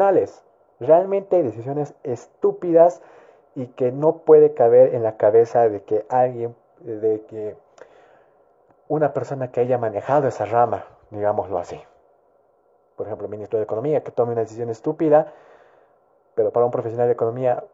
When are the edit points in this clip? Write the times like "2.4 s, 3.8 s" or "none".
none